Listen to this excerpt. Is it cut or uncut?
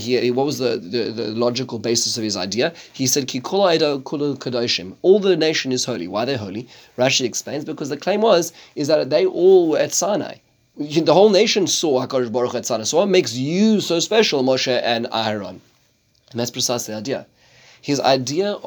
uncut